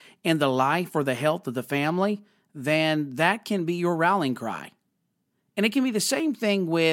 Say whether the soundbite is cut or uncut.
uncut